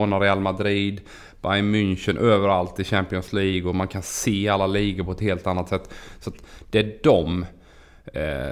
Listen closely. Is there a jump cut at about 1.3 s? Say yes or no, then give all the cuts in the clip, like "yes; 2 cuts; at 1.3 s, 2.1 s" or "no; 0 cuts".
no; 0 cuts